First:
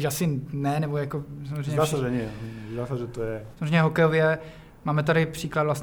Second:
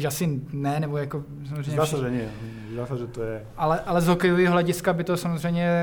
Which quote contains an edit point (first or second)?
first